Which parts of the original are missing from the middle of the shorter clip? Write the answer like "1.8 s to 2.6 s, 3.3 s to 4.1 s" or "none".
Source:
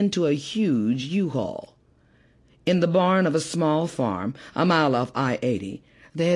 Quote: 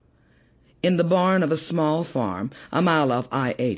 none